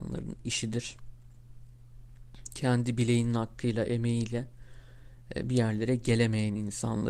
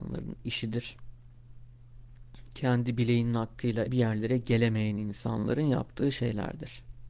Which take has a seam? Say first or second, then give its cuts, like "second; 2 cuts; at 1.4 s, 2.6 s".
second; 1 cut; at 3.9 s